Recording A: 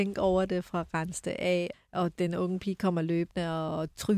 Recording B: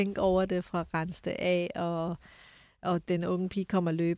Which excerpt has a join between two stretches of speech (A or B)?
A